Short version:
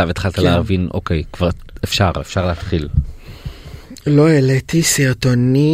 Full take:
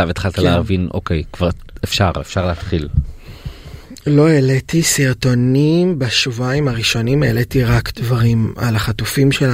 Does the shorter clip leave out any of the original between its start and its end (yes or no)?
no